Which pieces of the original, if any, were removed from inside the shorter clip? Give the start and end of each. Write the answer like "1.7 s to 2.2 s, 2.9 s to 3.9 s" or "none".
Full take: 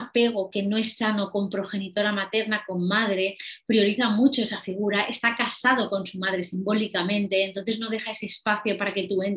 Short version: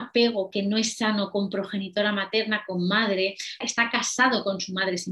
3.6 s to 5.1 s